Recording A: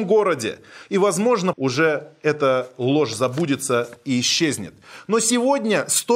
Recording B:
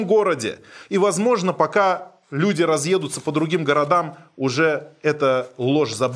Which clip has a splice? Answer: A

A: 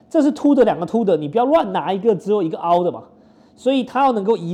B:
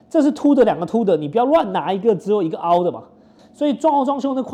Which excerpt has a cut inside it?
B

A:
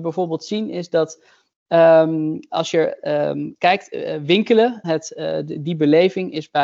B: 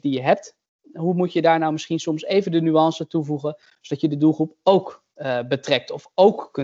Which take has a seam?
A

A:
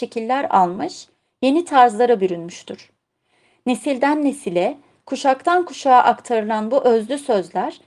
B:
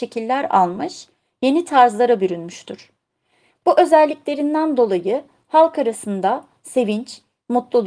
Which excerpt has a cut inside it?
B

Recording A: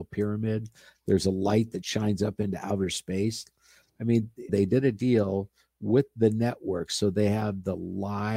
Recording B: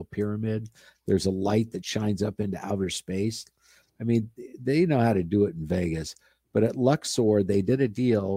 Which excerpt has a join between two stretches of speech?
A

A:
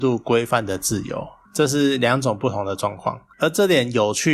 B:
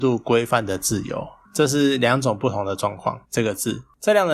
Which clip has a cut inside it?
B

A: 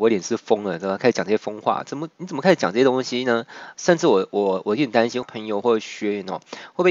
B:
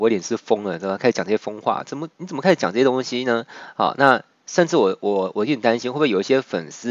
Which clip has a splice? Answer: A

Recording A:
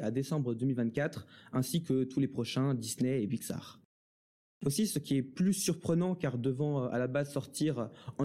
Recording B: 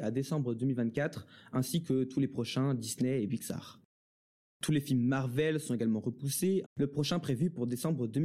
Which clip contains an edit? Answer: B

